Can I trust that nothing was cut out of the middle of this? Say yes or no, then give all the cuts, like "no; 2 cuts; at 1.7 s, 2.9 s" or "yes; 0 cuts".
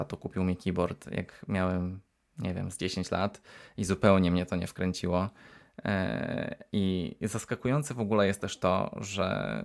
yes; 0 cuts